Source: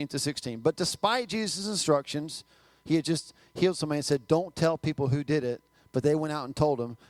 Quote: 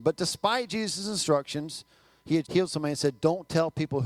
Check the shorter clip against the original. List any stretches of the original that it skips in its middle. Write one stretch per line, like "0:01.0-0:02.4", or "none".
0:03.0-0:03.5